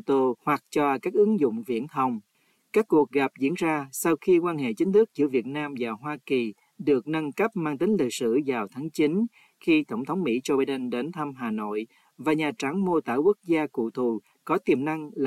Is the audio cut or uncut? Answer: uncut